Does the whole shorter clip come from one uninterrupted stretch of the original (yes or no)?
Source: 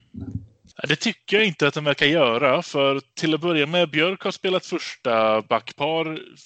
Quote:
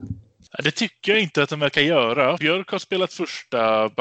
no